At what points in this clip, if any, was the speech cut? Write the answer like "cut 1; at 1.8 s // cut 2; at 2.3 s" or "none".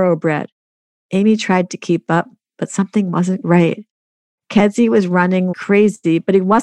cut 1; at 3.4 s // cut 2; at 5.5 s